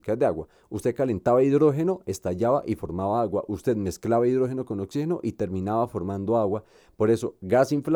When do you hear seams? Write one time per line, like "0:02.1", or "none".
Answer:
none